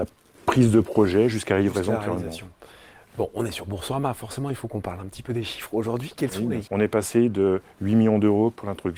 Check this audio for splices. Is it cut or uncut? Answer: cut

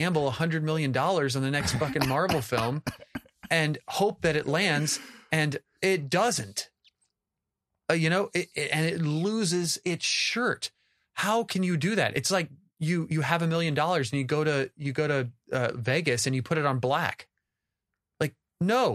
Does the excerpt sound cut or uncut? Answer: uncut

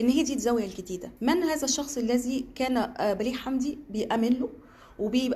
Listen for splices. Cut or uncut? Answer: cut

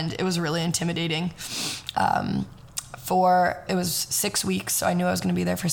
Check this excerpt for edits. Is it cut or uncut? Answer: cut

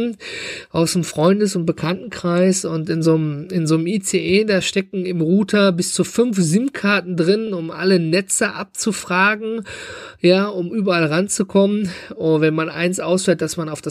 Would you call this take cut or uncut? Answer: uncut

